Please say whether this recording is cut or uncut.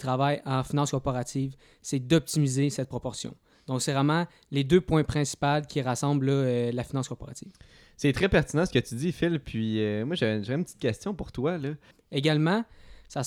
cut